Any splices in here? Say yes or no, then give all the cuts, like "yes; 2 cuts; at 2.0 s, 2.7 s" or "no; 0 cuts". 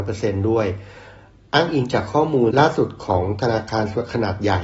yes; 1 cut; at 2.5 s